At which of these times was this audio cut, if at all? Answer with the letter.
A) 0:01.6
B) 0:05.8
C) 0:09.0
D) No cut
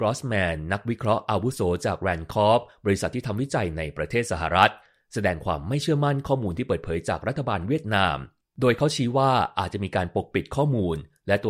D